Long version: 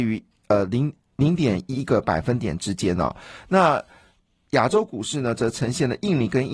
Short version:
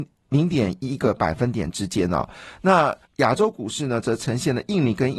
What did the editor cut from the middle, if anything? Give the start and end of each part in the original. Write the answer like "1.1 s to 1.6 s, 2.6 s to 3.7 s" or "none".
3.9 s to 4.4 s